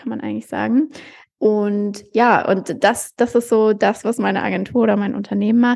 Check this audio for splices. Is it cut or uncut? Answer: uncut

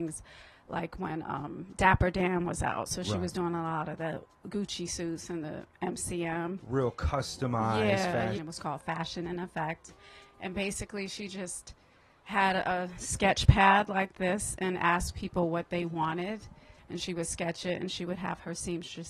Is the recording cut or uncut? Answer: cut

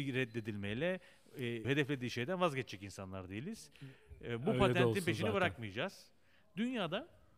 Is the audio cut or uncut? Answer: cut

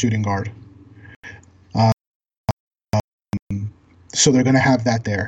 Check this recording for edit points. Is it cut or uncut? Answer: uncut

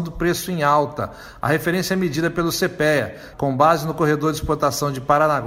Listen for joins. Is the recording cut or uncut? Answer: cut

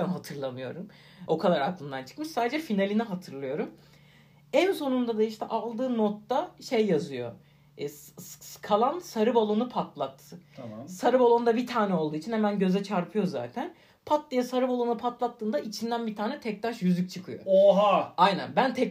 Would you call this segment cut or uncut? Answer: uncut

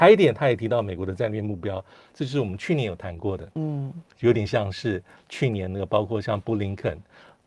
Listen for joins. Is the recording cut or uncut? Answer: cut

